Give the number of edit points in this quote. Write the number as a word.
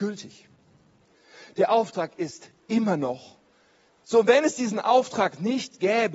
one